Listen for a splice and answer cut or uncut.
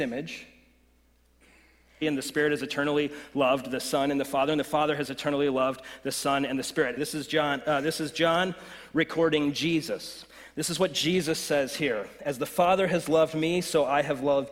cut